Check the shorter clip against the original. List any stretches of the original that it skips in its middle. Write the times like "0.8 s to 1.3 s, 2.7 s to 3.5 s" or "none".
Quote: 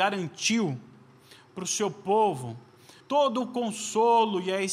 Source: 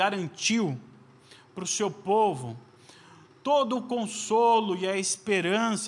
3.0 s to 3.4 s